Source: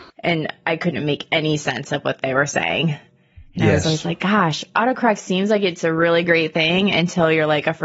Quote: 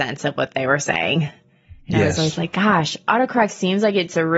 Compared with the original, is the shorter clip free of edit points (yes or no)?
yes